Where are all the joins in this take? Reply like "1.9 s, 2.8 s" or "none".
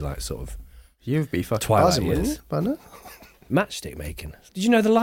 3.5 s